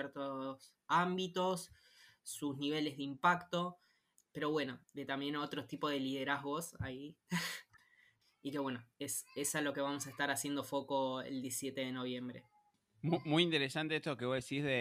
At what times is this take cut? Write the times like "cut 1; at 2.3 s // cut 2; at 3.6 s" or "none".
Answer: cut 1; at 4.8 s

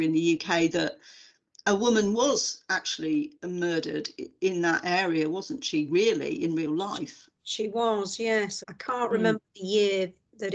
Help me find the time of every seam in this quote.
cut 1; at 8.6 s

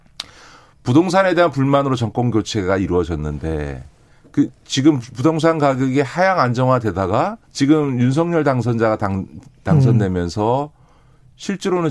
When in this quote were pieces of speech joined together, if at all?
cut 1; at 7.4 s

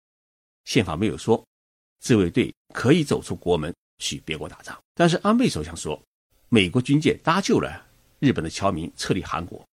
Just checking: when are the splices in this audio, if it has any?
cut 1; at 4.8 s // cut 2; at 6.3 s

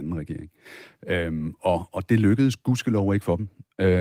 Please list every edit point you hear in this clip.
none

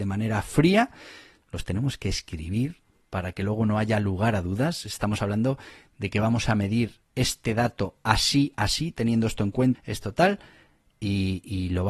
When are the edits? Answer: cut 1; at 8.5 s // cut 2; at 9.7 s

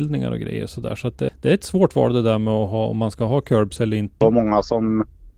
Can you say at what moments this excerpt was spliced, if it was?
cut 1; at 1.3 s // cut 2; at 4.2 s

